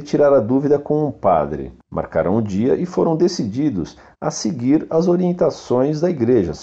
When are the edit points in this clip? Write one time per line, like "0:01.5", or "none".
none